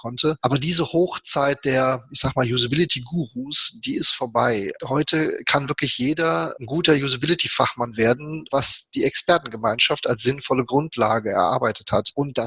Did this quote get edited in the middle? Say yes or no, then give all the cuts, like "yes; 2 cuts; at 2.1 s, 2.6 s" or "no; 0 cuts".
yes; 1 cut; at 8.5 s